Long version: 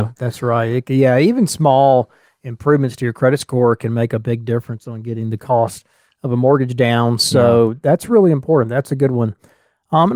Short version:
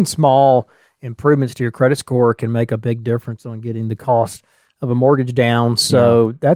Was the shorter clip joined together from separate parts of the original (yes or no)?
no